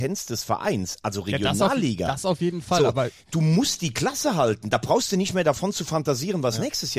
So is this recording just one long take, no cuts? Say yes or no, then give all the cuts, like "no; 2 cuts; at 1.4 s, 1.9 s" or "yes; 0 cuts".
yes; 0 cuts